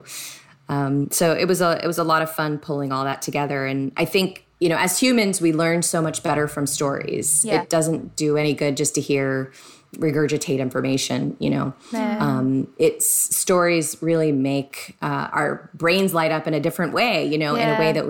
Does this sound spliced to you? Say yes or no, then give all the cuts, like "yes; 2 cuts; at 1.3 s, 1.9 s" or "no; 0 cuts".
no; 0 cuts